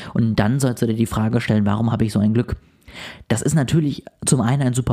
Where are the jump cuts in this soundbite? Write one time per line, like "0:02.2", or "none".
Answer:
none